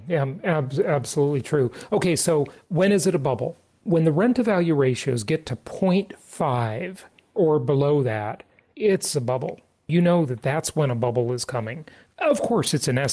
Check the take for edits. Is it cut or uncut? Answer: uncut